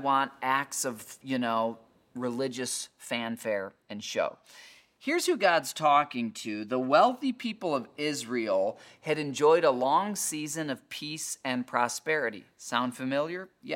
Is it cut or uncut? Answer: uncut